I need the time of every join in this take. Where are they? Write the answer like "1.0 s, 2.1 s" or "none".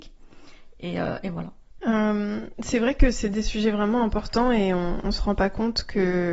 1.8 s